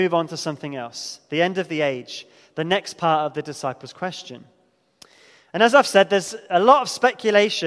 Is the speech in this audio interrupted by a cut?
no; 0 cuts

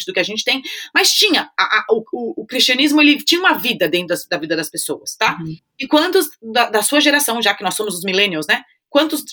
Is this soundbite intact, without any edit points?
yes; 0 cuts

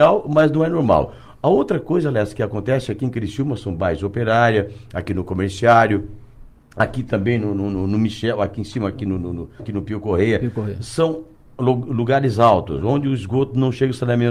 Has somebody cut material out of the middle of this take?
yes; 1 cut; at 9.6 s

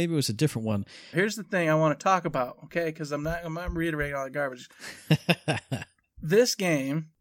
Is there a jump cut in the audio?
yes; 1 cut; at 1.1 s

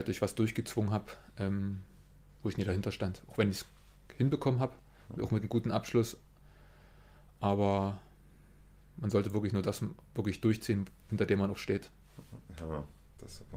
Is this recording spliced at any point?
no; 0 cuts

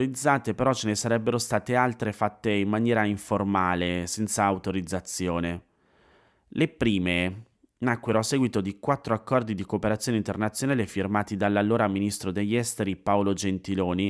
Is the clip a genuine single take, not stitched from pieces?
yes; 0 cuts

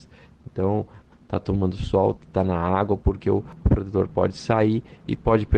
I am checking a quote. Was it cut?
yes; 2 cuts; at 1.1 s, 2.2 s

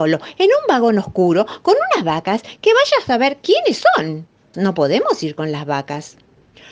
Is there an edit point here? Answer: yes; 1 cut; at 4.5 s

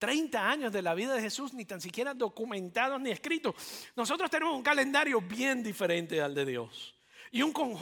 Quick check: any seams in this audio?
no; 0 cuts

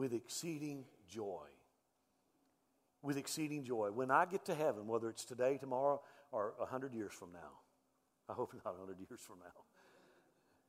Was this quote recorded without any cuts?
no; 1 cut; at 2.9 s

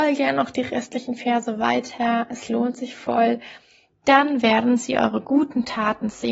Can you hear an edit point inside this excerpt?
yes; 1 cut; at 3.9 s

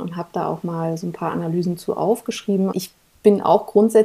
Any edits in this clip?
yes; 1 cut; at 2.7 s

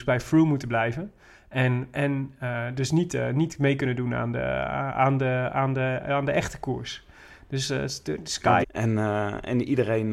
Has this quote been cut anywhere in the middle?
yes; 2 cuts; at 1.9 s, 8.6 s

